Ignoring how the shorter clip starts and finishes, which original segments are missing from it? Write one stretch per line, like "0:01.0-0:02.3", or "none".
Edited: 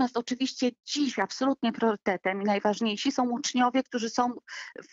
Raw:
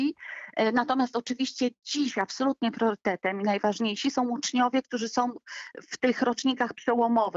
none